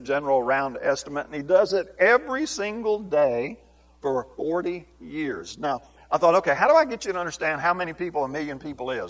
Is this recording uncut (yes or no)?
yes